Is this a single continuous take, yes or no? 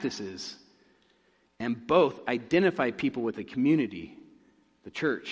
yes